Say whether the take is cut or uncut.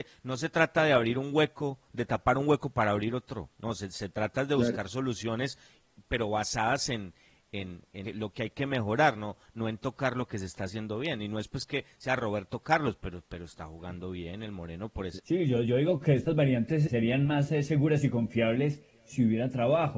cut